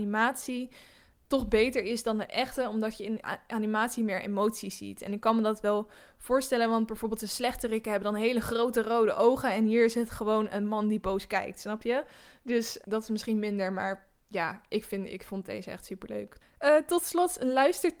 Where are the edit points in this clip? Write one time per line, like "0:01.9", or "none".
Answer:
0:12.8
0:16.4